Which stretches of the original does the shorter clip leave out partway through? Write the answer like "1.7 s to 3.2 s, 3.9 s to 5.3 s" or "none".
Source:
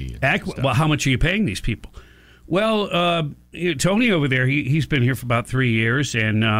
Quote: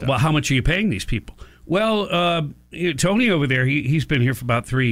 2.1 s to 2.3 s